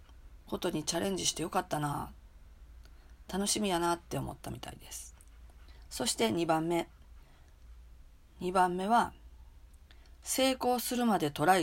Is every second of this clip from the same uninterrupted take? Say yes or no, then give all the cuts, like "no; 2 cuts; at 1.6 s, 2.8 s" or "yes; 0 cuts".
yes; 0 cuts